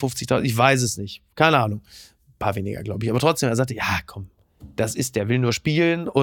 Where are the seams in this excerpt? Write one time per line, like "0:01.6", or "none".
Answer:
none